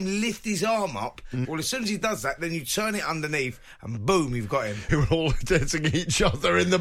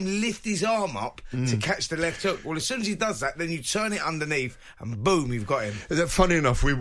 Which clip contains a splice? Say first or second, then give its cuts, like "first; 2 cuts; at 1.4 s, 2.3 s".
first; 2 cuts; at 1.4 s, 4.9 s